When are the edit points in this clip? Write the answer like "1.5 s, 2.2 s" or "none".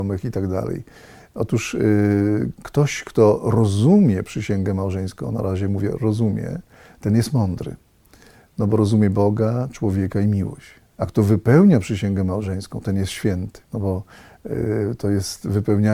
10.9 s, 13.6 s